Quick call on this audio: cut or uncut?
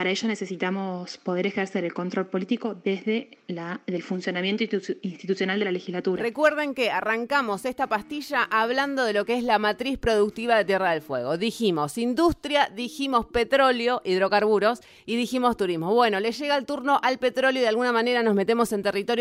uncut